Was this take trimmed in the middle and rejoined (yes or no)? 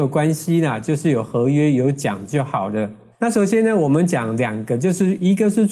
yes